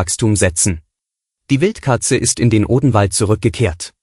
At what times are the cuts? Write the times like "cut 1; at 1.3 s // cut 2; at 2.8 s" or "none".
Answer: cut 1; at 1.3 s